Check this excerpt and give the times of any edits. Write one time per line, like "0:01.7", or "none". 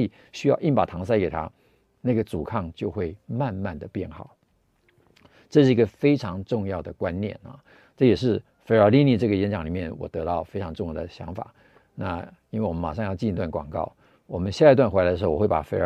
none